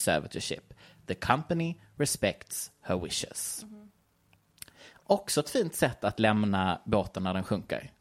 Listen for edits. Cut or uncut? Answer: uncut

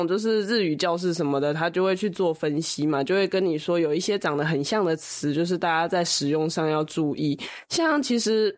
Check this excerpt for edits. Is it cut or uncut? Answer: uncut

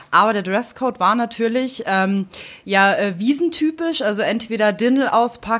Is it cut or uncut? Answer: uncut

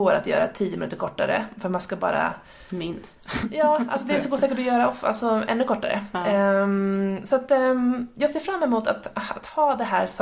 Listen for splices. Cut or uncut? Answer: uncut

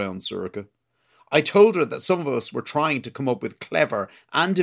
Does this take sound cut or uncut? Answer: uncut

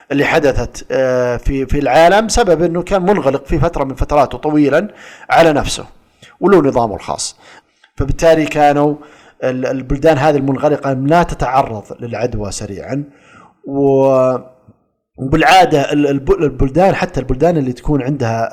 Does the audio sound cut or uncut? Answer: uncut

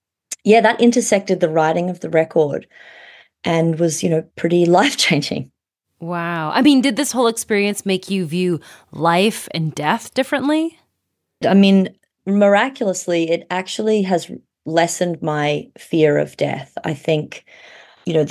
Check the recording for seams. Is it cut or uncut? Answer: cut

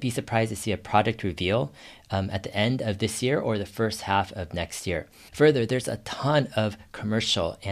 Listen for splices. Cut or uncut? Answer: uncut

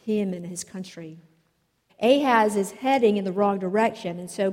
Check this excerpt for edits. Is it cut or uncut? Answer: cut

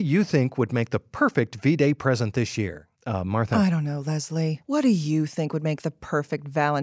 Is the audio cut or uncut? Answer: cut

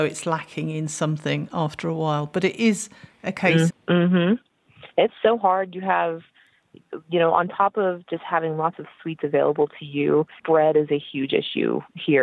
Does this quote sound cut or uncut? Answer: cut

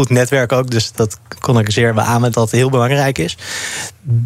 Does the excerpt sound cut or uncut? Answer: cut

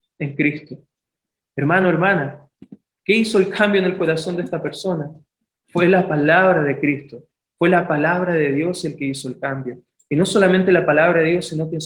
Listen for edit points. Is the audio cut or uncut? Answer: uncut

